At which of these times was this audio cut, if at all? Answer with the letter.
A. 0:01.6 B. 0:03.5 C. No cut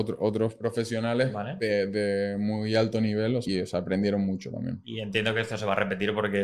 B